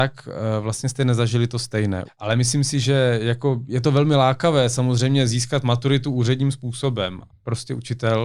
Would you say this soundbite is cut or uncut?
cut